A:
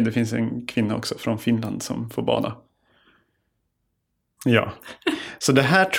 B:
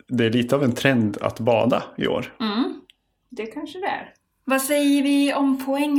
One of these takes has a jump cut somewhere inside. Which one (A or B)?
A